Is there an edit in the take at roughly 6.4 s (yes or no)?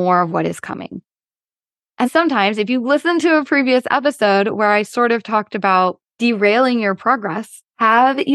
no